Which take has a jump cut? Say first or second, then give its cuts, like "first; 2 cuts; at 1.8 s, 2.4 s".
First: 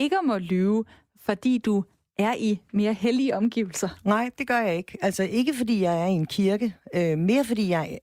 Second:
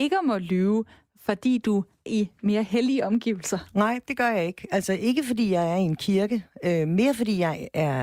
second; 1 cut; at 2.1 s